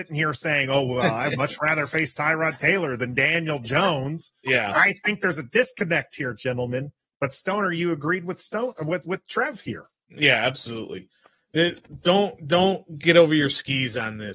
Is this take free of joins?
yes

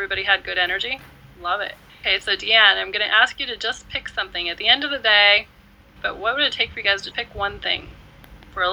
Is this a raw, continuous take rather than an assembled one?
no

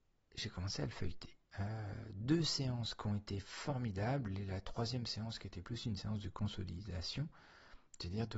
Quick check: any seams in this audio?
yes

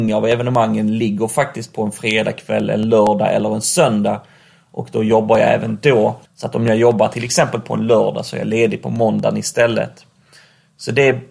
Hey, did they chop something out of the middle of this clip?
yes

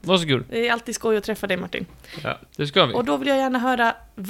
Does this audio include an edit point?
yes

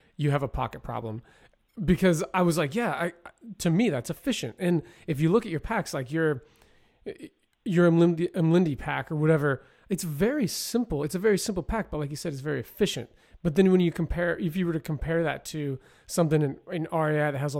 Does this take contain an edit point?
no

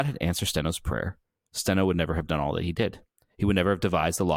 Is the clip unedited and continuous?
yes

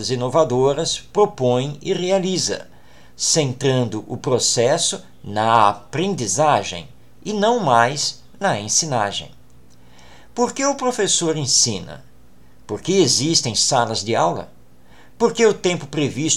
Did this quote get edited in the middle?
no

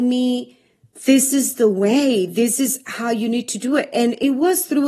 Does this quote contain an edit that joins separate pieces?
no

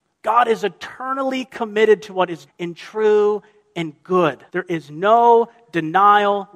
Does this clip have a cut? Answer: yes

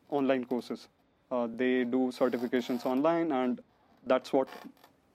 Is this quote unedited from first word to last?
yes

